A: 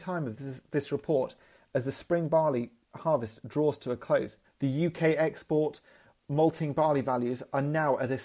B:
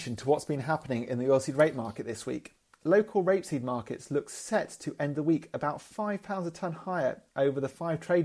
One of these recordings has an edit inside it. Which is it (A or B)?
A